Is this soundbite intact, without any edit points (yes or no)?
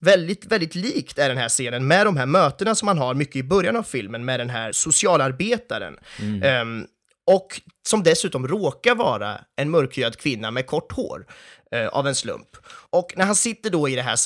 no